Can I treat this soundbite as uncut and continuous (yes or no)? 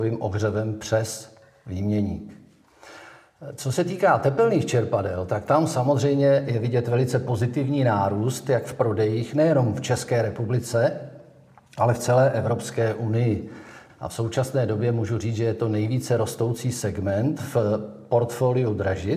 no